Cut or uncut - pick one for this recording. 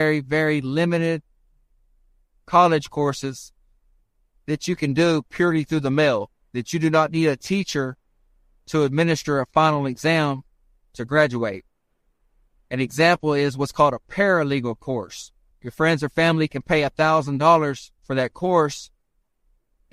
cut